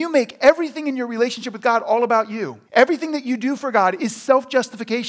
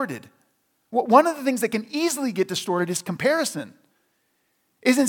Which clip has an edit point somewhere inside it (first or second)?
first